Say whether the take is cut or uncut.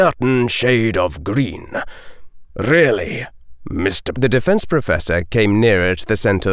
cut